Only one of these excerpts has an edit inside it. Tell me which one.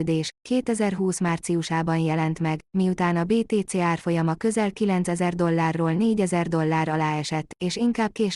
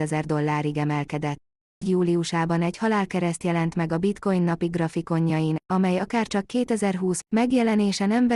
second; 2 cuts; at 1.8 s, 7.2 s

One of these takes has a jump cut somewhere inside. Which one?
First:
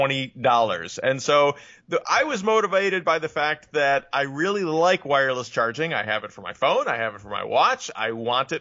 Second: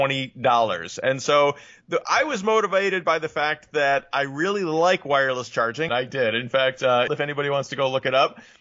second; 2 cuts; at 5.9 s, 7.1 s

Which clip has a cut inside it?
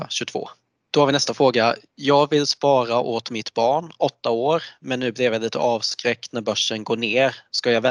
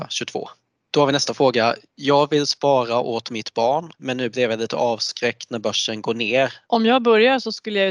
second; 2 cuts; at 3.9 s, 6.7 s

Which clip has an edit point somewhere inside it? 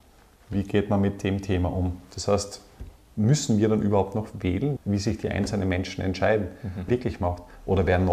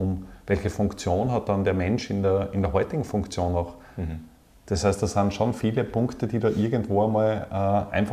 first; 2 cuts; at 4.8 s, 6.9 s

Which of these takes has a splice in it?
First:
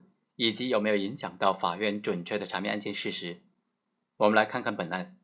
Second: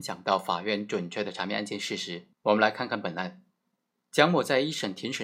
second; 1 cut; at 2.3 s

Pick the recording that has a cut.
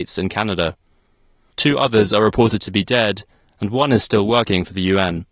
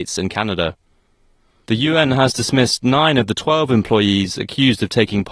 first; 1 cut; at 1.5 s

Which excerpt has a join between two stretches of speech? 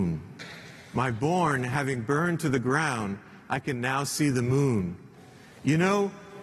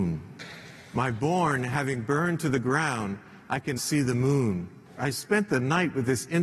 second; 2 cuts; at 3.8 s, 5.0 s

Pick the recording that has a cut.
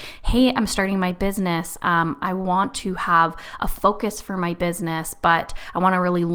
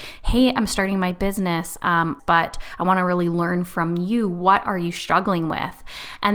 second; 1 cut; at 2.2 s

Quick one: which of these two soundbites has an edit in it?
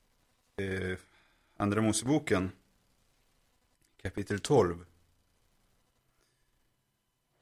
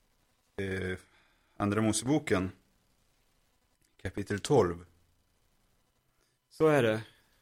second; 1 cut; at 6.4 s

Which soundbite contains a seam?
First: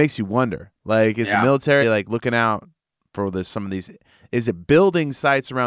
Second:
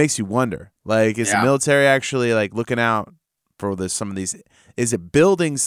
first; 1 cut; at 1.8 s

